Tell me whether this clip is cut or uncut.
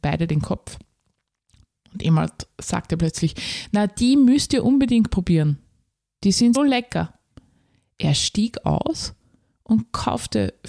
cut